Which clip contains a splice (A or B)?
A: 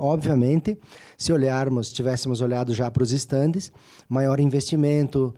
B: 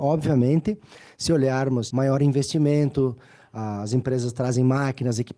B